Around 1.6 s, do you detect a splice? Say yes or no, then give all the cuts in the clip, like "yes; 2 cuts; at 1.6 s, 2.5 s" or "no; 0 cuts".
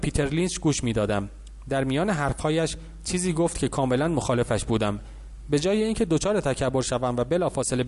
no; 0 cuts